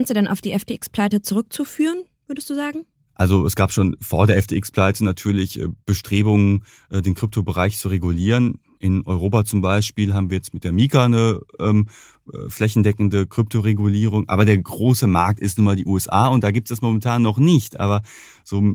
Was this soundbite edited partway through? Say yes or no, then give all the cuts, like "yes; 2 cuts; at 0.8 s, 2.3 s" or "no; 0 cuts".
no; 0 cuts